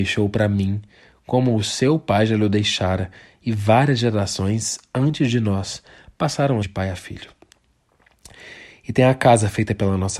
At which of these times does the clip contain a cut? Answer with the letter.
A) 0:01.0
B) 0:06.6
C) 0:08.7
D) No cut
B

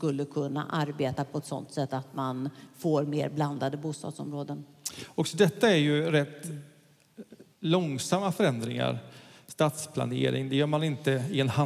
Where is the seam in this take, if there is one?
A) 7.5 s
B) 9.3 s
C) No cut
A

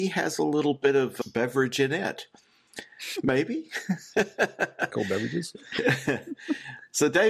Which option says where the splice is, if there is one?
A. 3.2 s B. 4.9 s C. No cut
B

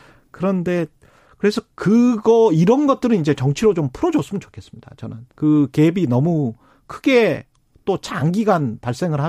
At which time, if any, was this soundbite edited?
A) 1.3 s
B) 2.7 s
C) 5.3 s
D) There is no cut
C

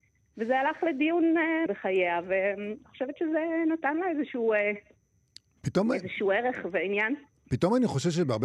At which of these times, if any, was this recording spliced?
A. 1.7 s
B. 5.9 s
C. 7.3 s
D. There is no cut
A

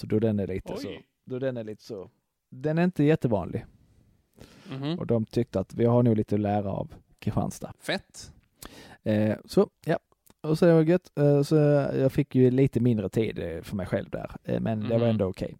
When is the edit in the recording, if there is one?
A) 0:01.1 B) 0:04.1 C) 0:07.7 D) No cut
C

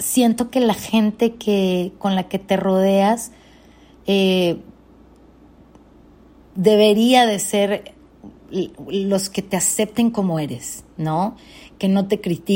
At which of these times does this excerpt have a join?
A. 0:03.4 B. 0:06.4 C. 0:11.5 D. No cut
D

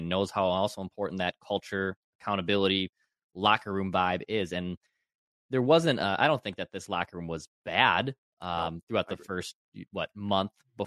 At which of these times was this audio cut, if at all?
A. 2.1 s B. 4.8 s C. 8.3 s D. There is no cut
D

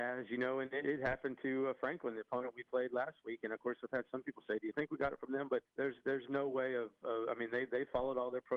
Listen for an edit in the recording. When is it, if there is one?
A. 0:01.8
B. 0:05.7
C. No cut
B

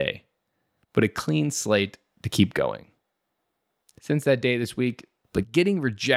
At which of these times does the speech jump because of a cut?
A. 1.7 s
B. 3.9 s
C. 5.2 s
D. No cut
C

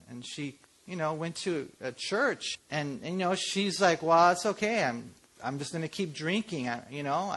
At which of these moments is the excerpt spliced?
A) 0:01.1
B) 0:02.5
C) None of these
B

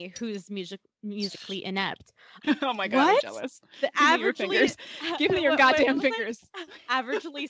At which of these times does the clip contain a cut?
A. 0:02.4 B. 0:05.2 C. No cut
A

